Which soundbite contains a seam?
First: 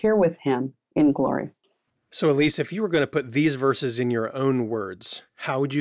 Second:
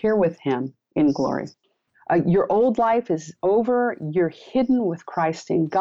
second; 1 cut; at 1.9 s

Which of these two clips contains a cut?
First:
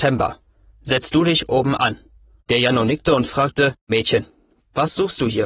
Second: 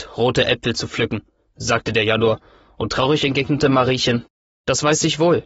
first; 2 cuts; at 2.4 s, 3.9 s

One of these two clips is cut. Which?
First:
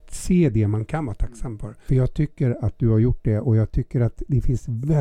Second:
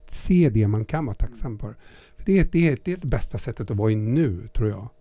first; 1 cut; at 1.9 s

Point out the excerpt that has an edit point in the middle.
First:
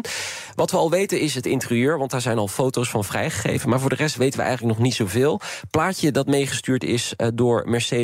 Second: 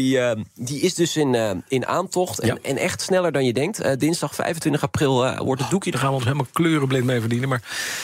second; 1 cut; at 5.9 s

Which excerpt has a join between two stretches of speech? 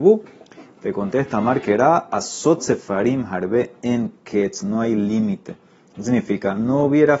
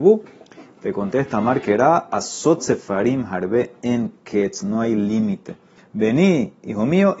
second; 1 cut; at 5.8 s

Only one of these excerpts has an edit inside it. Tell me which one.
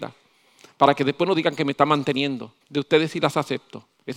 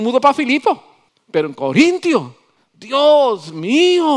first; 1 cut; at 2.6 s

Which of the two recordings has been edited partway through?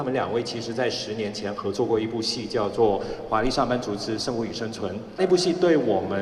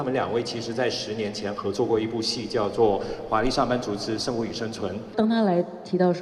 second; 1 cut; at 5.1 s

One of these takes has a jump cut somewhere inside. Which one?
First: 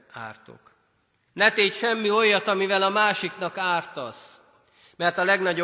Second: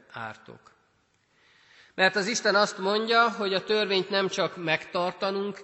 first; 1 cut; at 1.3 s

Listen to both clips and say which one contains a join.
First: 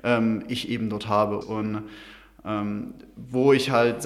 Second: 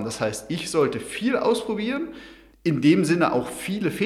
first; 1 cut; at 1.4 s

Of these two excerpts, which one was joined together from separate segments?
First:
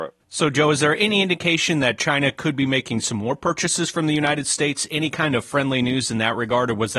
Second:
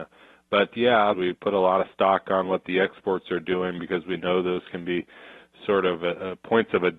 second; 1 cut; at 1.1 s

